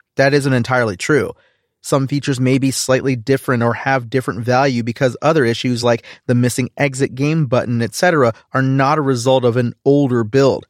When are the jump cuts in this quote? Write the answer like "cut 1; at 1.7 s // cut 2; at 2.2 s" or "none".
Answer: none